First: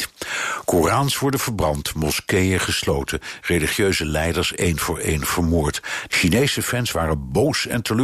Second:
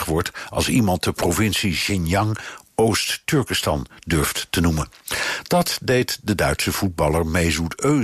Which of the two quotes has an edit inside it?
first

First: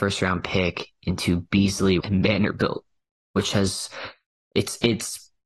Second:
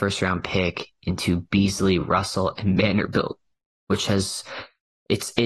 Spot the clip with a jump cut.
first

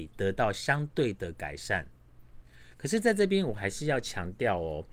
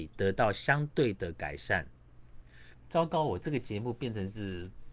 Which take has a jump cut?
second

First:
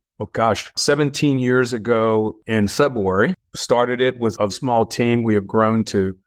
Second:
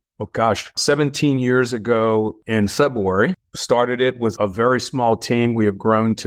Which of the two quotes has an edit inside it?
first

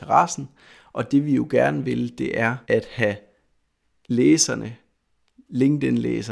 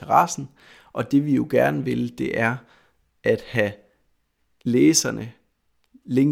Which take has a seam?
first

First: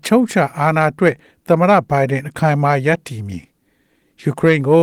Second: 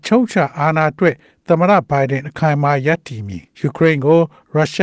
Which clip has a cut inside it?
second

